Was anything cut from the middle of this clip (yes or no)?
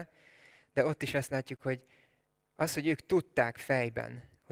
no